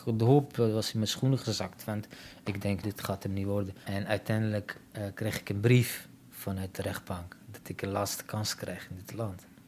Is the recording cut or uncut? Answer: cut